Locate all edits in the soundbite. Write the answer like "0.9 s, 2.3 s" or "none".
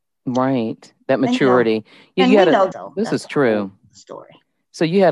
2.7 s